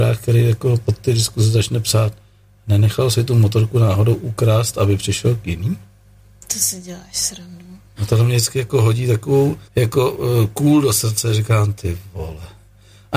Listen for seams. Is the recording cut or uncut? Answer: cut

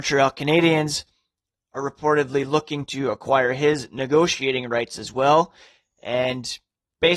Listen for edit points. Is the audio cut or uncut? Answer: uncut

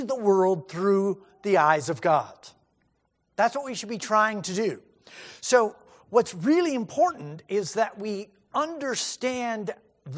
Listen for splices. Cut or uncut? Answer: uncut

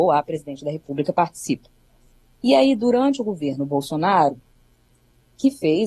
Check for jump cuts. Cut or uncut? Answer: uncut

